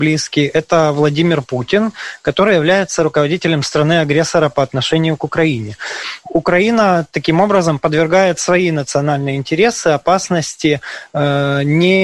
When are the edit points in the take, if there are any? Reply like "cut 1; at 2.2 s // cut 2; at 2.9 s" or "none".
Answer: cut 1; at 6.2 s